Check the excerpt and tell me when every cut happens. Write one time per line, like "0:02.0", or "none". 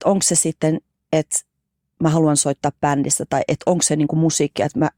none